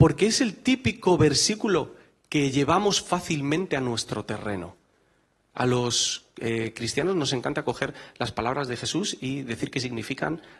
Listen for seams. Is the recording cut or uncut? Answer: uncut